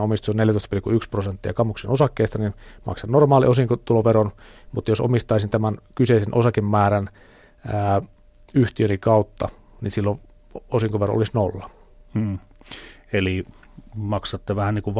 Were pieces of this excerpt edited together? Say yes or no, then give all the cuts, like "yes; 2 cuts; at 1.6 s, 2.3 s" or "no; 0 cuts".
no; 0 cuts